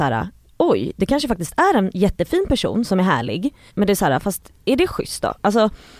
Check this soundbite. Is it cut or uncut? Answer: cut